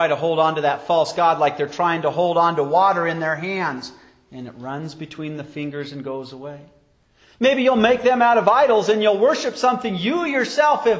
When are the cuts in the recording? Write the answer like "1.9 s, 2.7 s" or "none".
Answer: 7.2 s